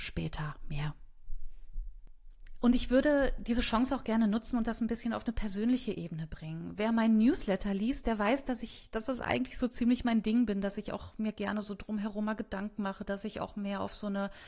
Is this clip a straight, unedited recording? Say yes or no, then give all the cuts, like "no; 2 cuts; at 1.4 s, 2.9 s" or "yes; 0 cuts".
yes; 0 cuts